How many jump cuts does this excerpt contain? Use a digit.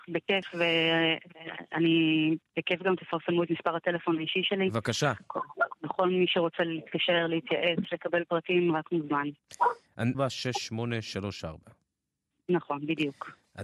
1